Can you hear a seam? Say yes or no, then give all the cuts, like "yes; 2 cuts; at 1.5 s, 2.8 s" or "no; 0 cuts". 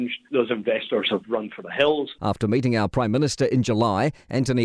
yes; 1 cut; at 2.2 s